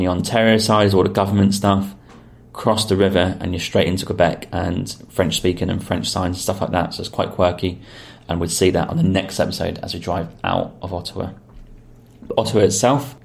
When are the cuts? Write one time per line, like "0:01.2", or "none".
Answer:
none